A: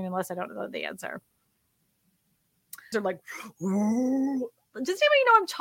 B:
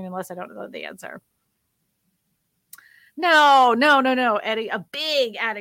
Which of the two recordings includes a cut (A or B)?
A